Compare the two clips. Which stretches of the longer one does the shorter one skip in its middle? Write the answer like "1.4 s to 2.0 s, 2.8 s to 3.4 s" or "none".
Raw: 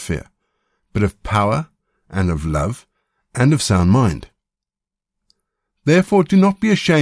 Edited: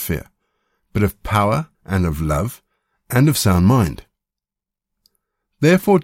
1.7 s to 2.0 s